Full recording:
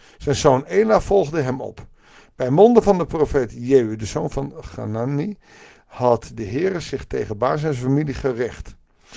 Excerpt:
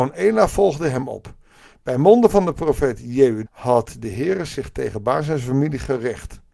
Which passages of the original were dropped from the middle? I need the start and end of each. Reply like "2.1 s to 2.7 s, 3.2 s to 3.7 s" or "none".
4.0 s to 5.8 s

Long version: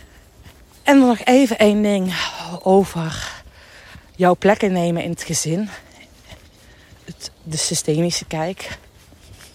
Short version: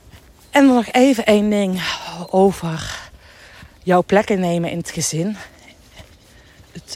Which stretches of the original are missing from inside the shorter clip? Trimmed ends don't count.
none

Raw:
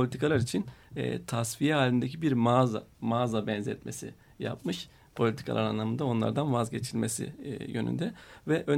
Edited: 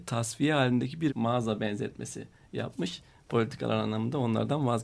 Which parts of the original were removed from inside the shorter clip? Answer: 2.3 s to 2.9 s

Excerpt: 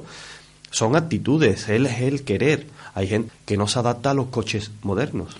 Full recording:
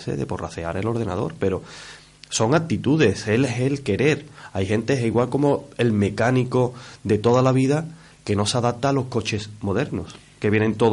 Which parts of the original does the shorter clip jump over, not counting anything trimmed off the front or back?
4.9 s to 8.1 s

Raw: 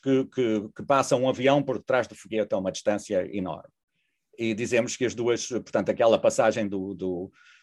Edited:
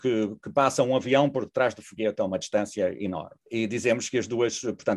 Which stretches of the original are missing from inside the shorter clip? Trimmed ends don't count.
3.7 s to 4.3 s

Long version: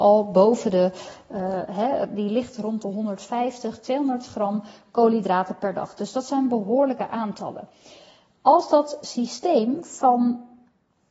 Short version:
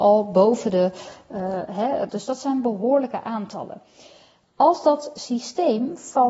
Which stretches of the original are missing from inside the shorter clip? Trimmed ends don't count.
2.1 s to 6.0 s

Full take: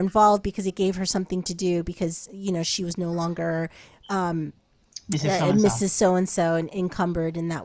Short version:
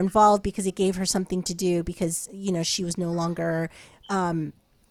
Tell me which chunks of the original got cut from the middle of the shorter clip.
none

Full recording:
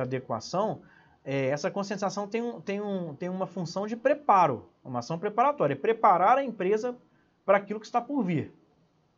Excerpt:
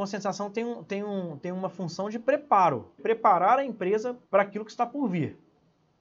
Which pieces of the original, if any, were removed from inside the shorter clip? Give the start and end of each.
4.8 s to 5.8 s, 7.0 s to 7.4 s

